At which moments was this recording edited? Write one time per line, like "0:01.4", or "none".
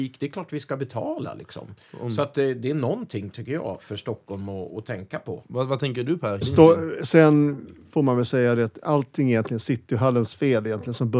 0:06.4
0:07.9